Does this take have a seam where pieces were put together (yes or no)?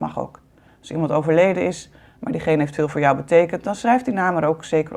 no